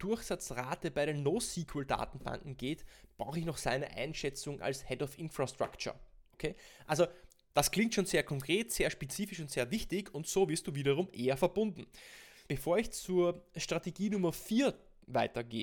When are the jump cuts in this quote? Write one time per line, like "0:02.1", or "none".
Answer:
0:12.5